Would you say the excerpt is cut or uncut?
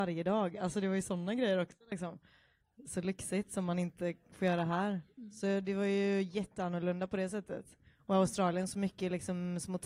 uncut